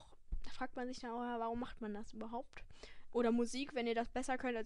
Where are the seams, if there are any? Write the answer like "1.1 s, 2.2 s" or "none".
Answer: 3.1 s

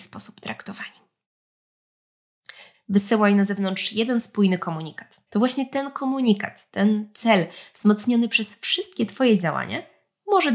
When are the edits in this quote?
2.7 s, 5.3 s

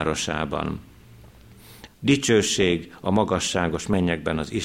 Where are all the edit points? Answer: 1.9 s

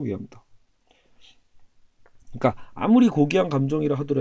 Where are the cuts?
none

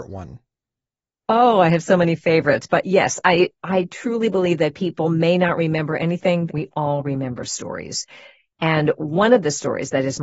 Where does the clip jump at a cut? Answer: 6.5 s

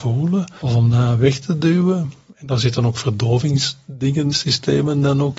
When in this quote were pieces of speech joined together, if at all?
4.3 s

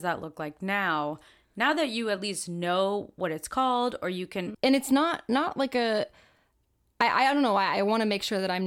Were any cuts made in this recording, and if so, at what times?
4.5 s

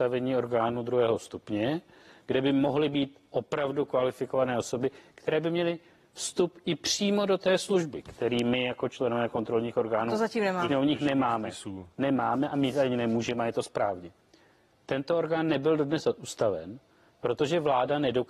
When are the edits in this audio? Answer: none

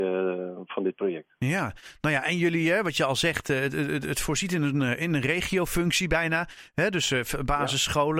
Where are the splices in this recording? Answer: none

